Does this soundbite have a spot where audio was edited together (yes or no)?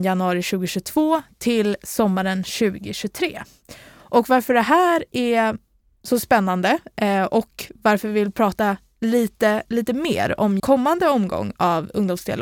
yes